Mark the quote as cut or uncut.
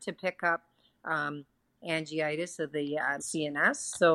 cut